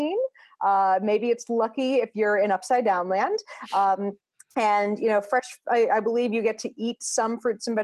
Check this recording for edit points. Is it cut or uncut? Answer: uncut